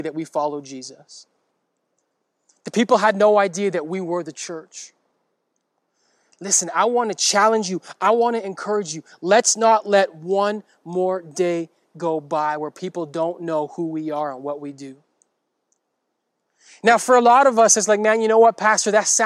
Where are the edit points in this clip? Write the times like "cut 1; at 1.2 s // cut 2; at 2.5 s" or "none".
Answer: none